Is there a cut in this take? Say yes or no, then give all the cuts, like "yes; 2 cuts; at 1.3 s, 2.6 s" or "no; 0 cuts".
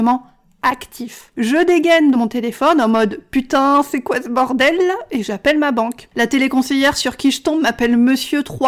yes; 1 cut; at 2.1 s